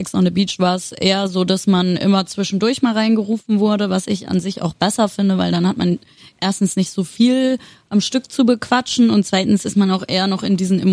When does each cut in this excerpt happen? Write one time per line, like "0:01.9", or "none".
none